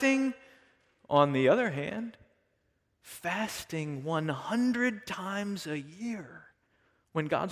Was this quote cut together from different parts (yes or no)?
no